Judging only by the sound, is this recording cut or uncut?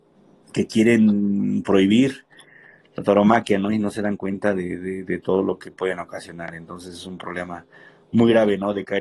uncut